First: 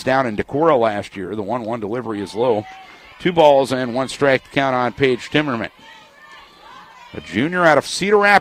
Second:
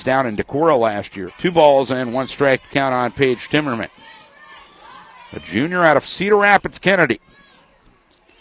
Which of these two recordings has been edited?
second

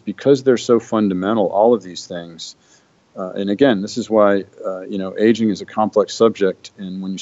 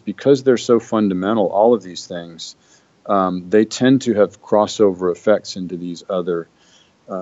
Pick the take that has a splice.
first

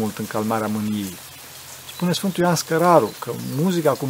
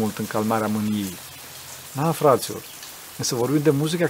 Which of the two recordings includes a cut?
second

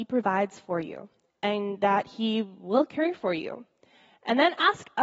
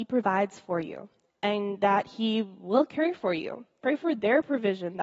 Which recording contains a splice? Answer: second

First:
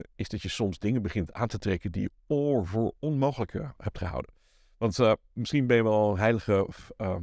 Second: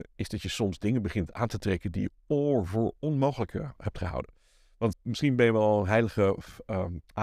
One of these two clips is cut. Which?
second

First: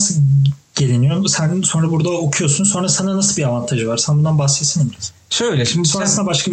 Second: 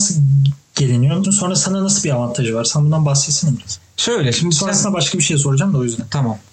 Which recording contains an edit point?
second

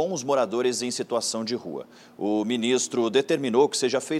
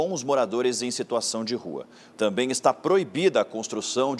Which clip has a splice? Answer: second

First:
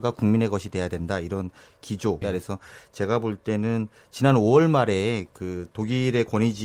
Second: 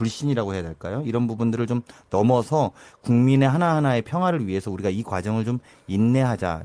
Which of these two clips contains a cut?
first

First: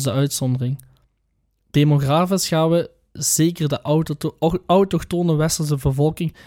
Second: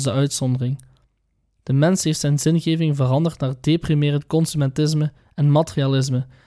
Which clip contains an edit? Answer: second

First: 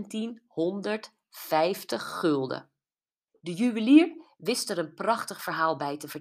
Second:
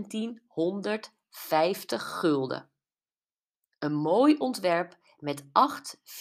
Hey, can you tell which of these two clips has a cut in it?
first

